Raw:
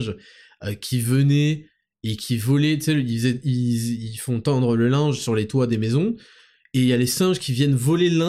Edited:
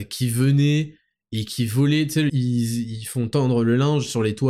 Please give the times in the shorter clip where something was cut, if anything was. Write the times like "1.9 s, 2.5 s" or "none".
2.3 s